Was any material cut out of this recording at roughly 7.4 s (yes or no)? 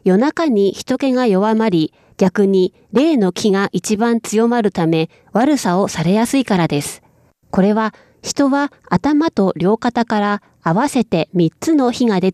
yes